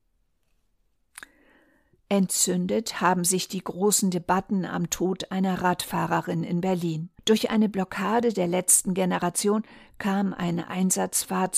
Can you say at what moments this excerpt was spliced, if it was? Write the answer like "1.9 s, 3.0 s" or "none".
7.2 s